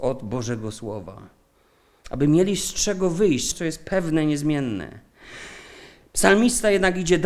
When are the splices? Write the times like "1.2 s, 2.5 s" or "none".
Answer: 3.5 s